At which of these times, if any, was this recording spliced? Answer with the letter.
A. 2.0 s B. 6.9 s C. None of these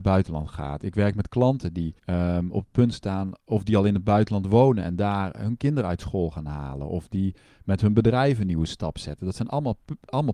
A